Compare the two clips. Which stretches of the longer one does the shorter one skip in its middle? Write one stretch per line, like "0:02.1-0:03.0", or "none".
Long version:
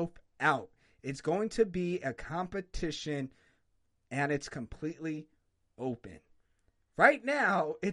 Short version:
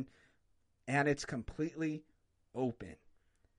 none